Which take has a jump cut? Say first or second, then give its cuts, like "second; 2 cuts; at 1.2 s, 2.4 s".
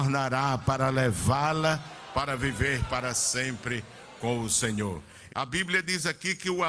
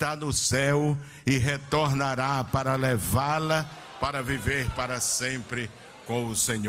first; 1 cut; at 5.3 s